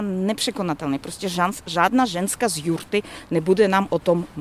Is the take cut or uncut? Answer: uncut